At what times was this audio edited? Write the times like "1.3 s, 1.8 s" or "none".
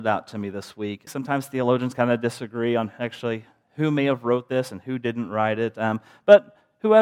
1.1 s